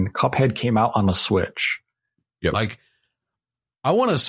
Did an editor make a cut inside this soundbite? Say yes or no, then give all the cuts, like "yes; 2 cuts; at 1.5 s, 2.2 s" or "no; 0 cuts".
yes; 1 cut; at 2.5 s